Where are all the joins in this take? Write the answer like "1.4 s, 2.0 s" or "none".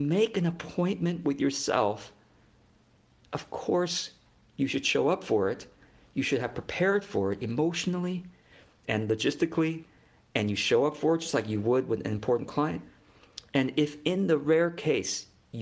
none

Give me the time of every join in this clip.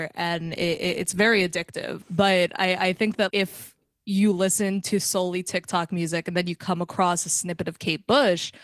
2.0 s, 3.3 s

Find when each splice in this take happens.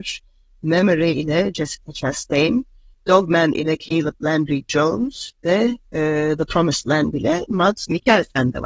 2.9 s

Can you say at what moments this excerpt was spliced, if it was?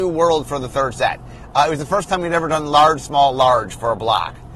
none

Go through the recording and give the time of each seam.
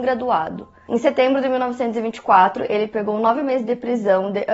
none

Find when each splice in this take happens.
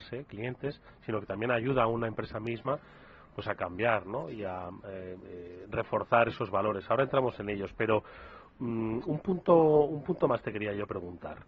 none

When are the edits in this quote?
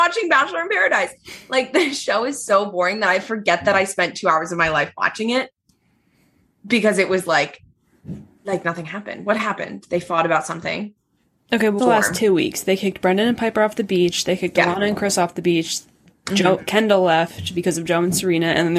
11.8 s

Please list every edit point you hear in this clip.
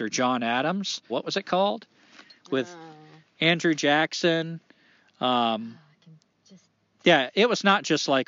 1.1 s

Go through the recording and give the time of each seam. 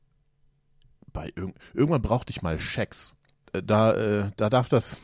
3.4 s

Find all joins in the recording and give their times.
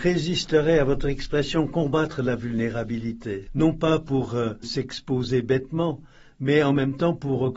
3.5 s, 4.6 s

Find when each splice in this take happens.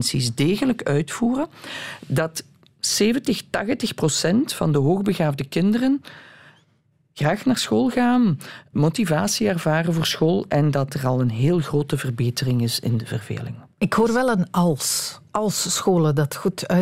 8.7 s

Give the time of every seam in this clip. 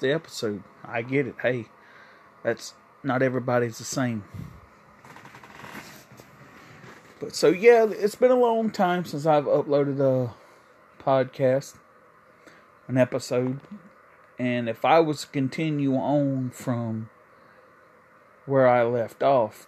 none

